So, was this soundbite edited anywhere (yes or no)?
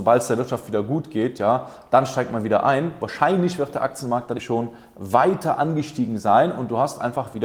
yes